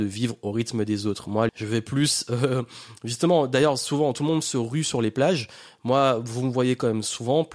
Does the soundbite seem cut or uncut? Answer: cut